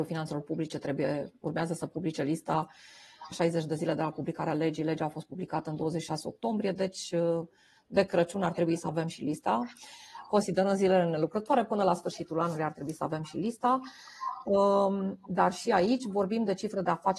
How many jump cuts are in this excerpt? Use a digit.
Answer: 1